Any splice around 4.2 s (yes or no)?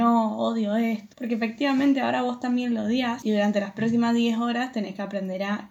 no